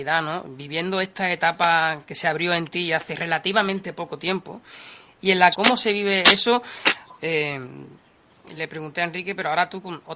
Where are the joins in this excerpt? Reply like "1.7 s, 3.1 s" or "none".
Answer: 5.5 s, 7.1 s, 8.6 s

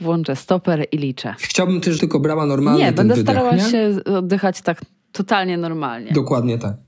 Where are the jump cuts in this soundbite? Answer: 2.0 s

